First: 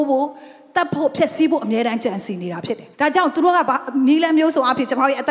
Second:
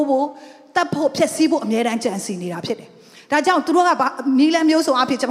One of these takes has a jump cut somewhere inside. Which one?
first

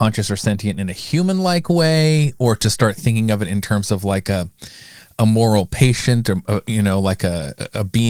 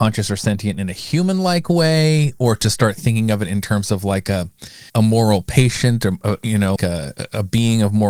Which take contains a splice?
second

